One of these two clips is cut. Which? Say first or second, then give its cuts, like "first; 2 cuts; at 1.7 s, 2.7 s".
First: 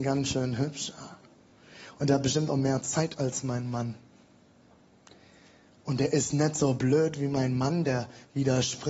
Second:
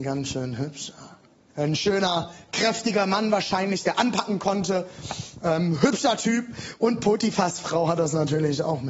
second; 1 cut; at 1.5 s